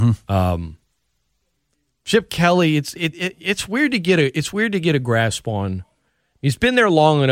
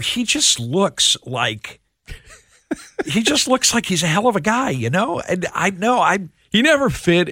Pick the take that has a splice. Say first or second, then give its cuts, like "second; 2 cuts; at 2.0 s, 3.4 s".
first; 1 cut; at 3.1 s